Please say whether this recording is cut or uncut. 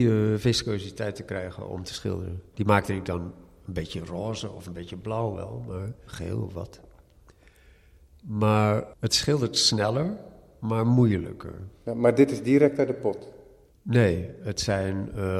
cut